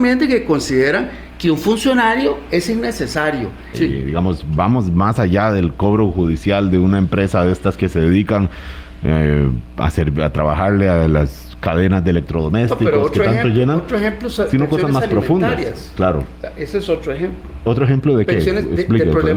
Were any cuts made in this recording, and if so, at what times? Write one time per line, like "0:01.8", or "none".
0:03.7